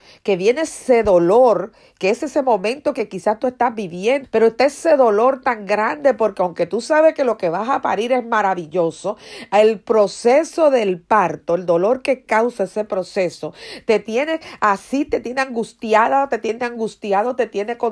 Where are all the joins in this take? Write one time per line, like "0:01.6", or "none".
0:04.2